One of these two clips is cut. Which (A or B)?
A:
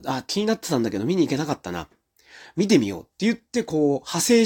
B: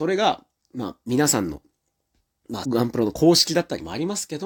B